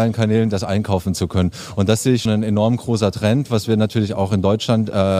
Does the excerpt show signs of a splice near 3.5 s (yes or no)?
no